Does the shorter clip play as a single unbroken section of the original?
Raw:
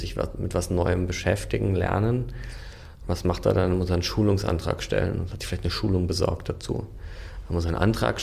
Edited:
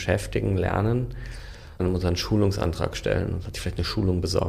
no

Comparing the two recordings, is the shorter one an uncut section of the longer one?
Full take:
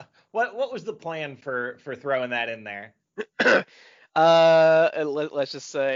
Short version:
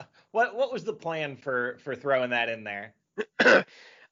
yes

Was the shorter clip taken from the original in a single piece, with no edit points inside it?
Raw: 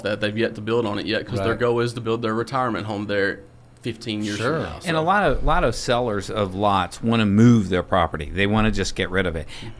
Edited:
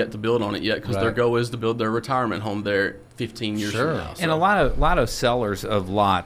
no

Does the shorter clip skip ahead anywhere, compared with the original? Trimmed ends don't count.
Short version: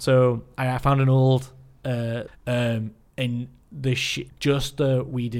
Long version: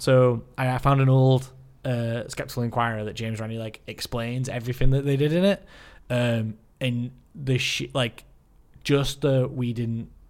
yes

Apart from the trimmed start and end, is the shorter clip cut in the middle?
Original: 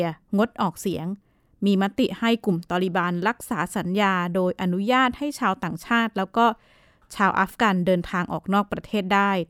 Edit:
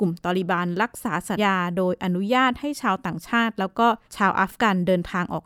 yes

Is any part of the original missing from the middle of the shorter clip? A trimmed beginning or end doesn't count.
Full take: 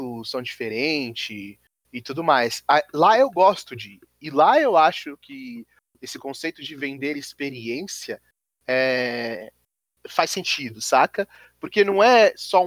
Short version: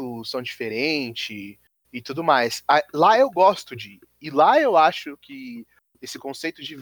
no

